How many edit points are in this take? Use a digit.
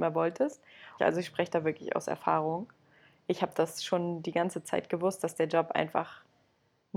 1